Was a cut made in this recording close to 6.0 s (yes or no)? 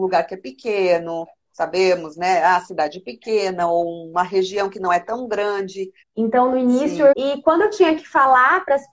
yes